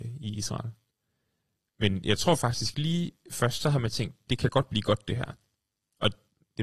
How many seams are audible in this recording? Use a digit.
1